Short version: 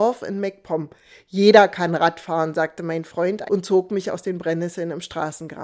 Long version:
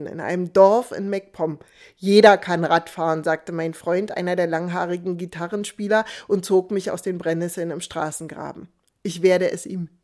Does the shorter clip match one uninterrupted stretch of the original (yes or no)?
no